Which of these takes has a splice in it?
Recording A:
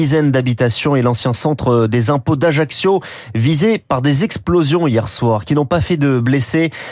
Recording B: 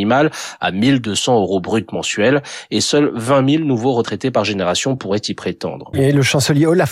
B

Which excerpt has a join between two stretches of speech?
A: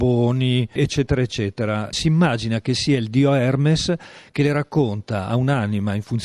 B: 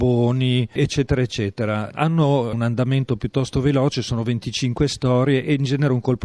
A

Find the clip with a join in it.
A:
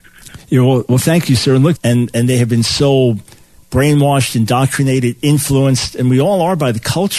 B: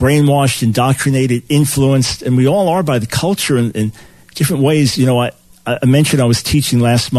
A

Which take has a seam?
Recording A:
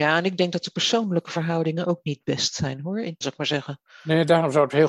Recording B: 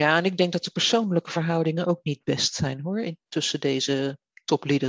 A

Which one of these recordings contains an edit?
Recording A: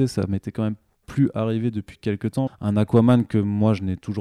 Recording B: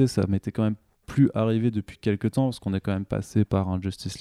A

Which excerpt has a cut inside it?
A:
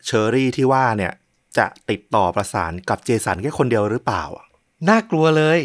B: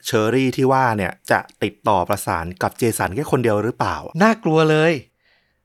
B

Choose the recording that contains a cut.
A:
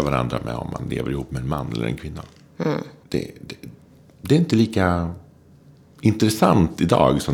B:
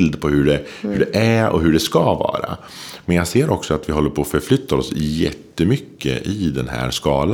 A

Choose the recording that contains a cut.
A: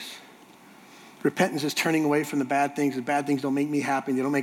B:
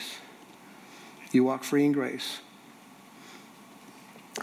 A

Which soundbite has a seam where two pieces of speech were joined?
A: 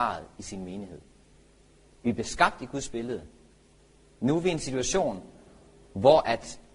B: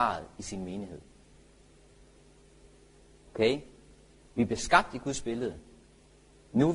A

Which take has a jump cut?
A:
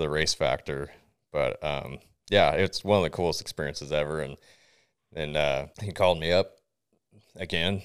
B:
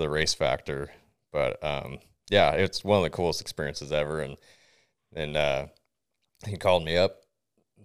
A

